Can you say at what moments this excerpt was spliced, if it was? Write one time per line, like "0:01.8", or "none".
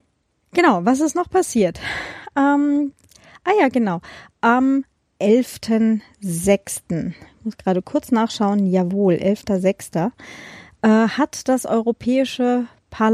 none